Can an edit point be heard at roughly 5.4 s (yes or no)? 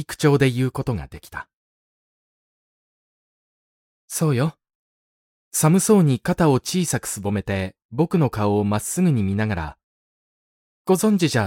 yes